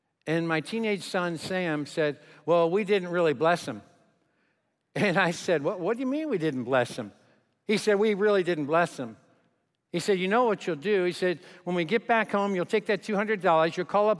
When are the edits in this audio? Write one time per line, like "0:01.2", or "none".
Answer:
none